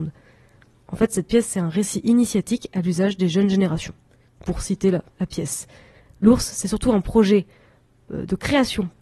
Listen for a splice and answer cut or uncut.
uncut